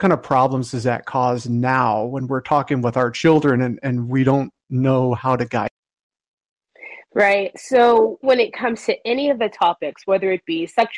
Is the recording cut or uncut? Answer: cut